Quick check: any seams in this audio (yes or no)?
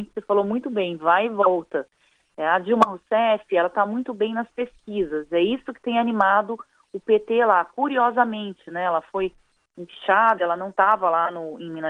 no